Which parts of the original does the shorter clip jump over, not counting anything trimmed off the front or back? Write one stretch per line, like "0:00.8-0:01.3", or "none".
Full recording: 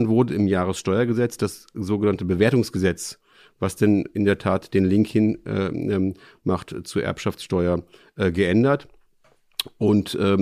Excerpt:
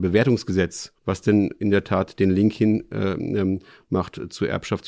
0:03.2-0:03.5